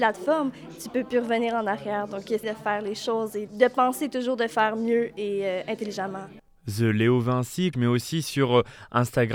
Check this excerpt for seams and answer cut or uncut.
cut